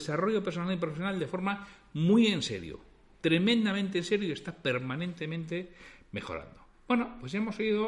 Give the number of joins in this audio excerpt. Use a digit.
1